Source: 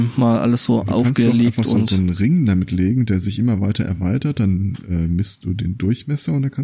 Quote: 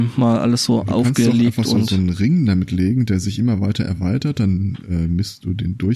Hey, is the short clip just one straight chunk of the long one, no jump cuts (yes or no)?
yes